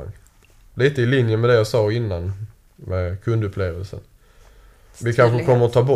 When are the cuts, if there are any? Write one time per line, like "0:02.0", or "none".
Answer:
0:04.9